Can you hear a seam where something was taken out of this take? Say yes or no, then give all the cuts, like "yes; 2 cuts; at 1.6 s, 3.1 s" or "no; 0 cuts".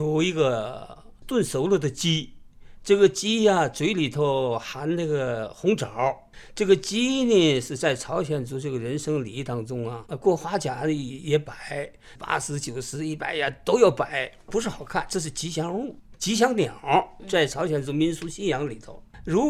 yes; 2 cuts; at 10.1 s, 12.2 s